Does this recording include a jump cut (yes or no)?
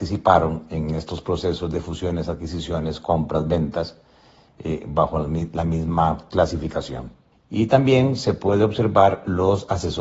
yes